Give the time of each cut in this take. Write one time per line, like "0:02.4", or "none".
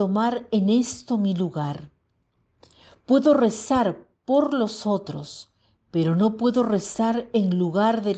none